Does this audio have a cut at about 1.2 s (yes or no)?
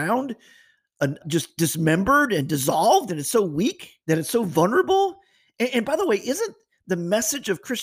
yes